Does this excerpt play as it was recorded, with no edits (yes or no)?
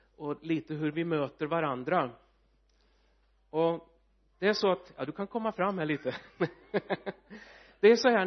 yes